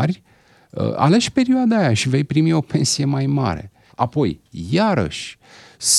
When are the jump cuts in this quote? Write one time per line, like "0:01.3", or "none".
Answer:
0:03.9

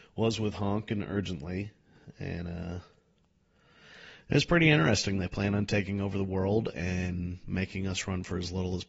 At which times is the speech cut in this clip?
none

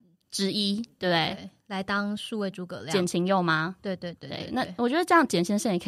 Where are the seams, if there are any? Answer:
0:01.0

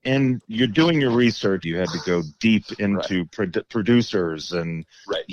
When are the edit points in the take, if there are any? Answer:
0:01.6

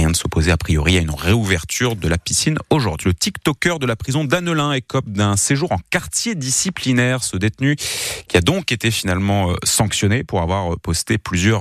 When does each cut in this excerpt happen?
0:03.0

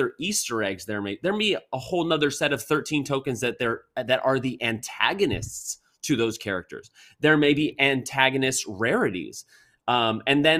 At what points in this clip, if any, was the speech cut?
none

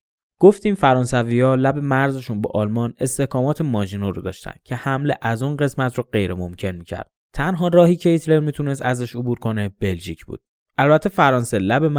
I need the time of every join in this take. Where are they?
none

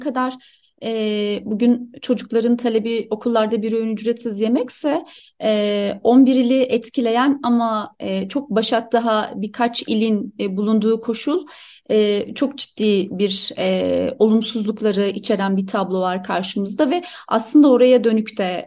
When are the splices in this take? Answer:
none

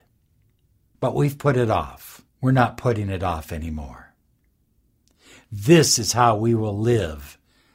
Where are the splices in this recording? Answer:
0:00.9
0:02.3

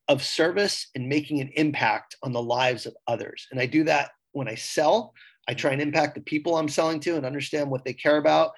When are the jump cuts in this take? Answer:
none

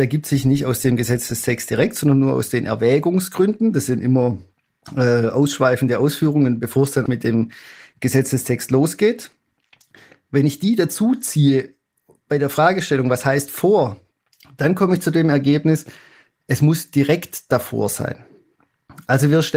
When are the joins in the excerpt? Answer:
0:07.1

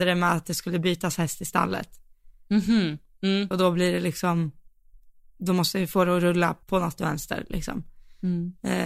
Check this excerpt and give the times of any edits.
0:03.5
0:06.6

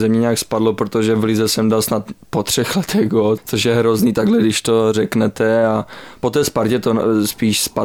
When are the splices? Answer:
none

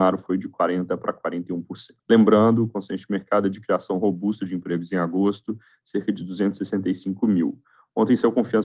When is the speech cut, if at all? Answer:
0:02.0

